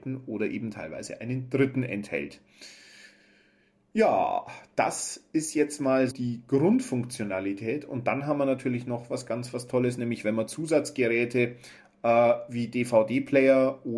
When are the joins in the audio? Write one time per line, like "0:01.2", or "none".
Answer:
0:06.1